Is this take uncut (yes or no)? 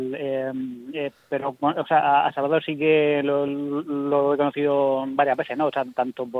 yes